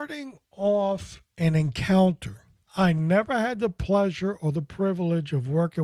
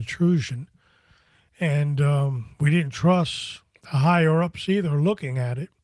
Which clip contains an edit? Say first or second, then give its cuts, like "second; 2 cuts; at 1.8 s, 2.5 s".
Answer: first; 1 cut; at 2.7 s